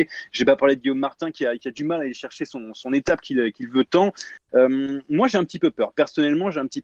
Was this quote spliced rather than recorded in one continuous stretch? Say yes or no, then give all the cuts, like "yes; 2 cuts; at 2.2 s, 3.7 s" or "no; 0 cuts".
no; 0 cuts